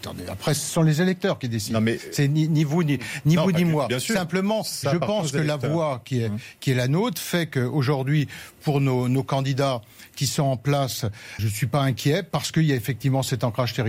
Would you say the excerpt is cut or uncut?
cut